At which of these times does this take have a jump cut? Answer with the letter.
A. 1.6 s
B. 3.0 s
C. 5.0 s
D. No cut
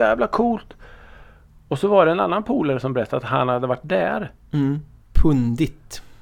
C